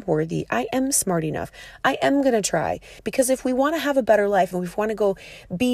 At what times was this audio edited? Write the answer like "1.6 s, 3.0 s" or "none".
3.0 s, 4.5 s